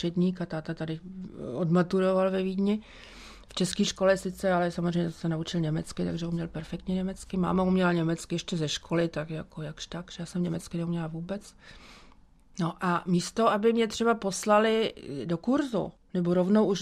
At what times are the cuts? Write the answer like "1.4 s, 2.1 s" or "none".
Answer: none